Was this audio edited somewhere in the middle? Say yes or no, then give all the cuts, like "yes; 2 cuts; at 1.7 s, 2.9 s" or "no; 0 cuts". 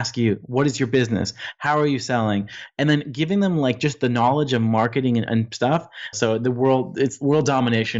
yes; 1 cut; at 6.1 s